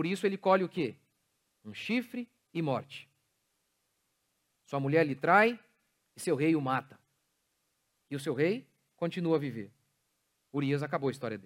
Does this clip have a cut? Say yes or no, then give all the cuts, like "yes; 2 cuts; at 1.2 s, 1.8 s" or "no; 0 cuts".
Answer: no; 0 cuts